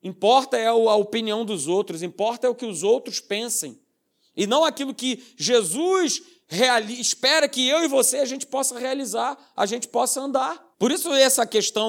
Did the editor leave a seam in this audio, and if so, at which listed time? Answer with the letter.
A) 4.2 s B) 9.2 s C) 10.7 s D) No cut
C